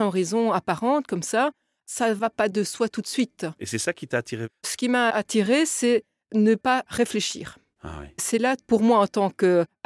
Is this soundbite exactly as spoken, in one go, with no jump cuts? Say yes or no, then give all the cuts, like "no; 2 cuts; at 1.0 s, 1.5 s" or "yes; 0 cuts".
yes; 0 cuts